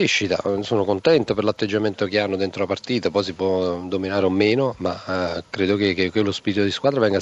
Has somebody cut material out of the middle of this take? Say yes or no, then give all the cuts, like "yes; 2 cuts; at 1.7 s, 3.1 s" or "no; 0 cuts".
no; 0 cuts